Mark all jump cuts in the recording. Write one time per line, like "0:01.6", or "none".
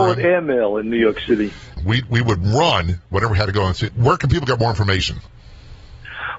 0:01.8
0:03.9